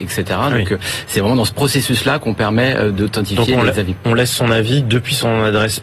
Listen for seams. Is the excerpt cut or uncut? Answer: uncut